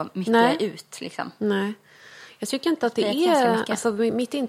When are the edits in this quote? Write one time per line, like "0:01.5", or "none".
none